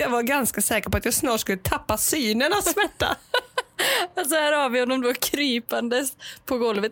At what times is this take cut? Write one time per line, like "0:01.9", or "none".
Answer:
none